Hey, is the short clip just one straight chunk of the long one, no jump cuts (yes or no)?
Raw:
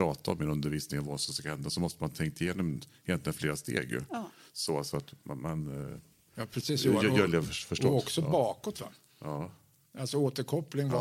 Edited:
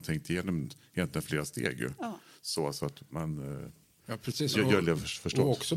no